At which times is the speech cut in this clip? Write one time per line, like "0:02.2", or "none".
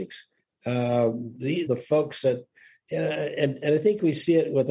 0:01.7